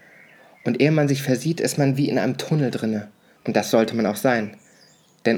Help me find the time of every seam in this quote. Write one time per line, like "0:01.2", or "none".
0:03.4